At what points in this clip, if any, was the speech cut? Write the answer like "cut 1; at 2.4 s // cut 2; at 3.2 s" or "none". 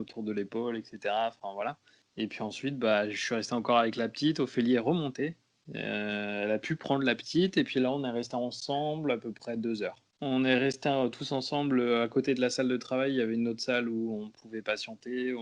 none